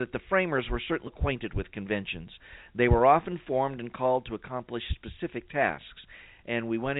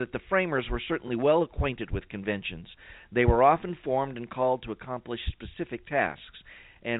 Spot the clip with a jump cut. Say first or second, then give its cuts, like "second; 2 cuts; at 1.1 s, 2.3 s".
first; 1 cut; at 1.1 s